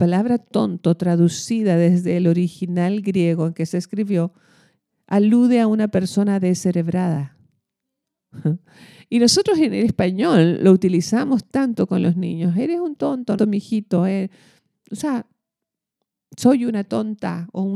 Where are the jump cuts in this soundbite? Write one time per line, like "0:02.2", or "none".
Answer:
0:13.4